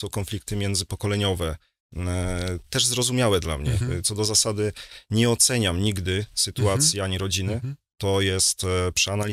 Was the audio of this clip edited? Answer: no; 0 cuts

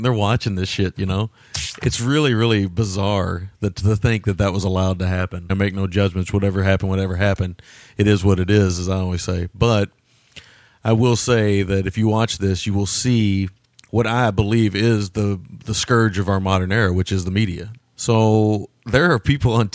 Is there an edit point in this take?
yes; 2 cuts; at 5.5 s, 17.8 s

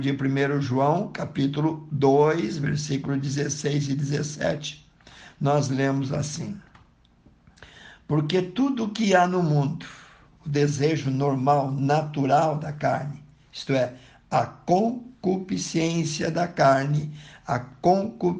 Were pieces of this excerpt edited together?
no; 0 cuts

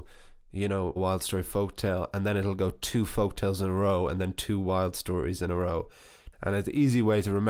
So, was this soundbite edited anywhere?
yes; 2 cuts; at 1.0 s, 6.3 s

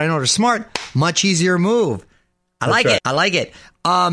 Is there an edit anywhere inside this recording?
yes; 1 cut; at 3.0 s

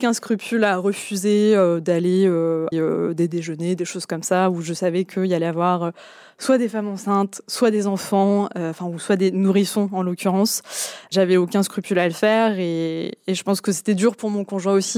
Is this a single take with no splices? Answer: no; 1 cut; at 2.7 s

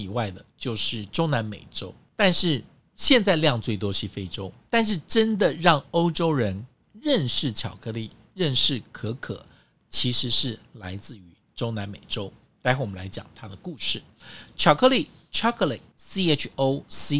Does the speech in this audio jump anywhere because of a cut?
no; 0 cuts

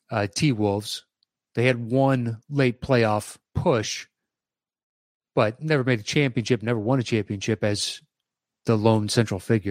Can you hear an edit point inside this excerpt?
yes; 1 cut; at 3.5 s

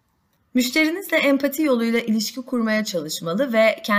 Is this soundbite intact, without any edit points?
yes; 0 cuts

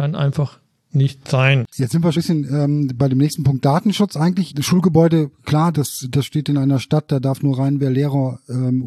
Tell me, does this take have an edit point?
yes; 3 cuts; at 2.1 s, 4.5 s, 5.7 s

